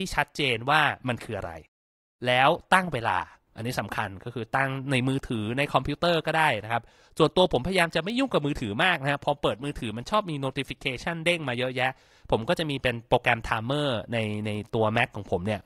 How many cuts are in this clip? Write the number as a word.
zero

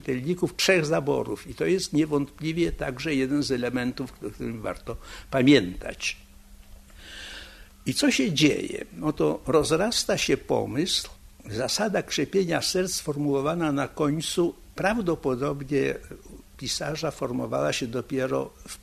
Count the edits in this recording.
zero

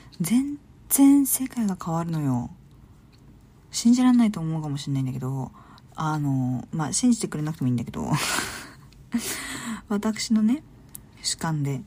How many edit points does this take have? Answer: zero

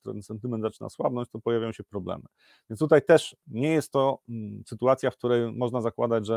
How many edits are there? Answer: one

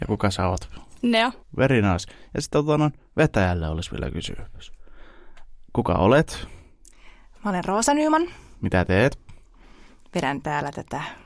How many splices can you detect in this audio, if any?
one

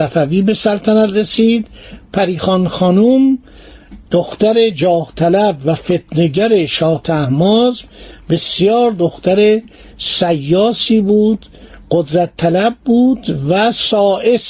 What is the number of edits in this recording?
one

